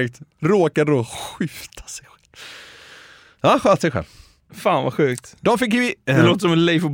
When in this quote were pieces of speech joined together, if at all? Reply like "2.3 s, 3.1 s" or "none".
none